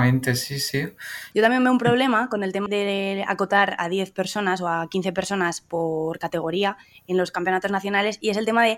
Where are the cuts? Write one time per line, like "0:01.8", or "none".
0:01.3
0:02.7